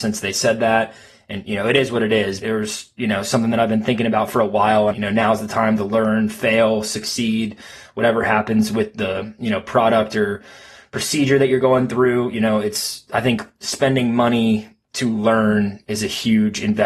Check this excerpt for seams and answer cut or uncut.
cut